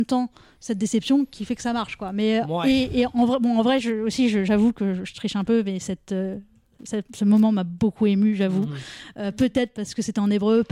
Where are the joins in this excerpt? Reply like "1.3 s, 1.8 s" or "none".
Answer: none